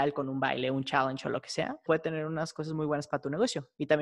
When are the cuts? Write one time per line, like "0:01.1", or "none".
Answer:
0:01.9